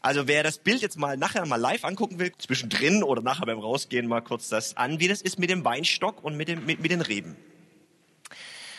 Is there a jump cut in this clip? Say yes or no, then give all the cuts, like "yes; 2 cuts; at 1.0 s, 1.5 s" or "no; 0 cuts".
yes; 1 cut; at 2.3 s